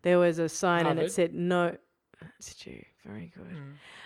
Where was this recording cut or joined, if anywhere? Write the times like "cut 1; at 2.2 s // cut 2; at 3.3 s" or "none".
cut 1; at 2.4 s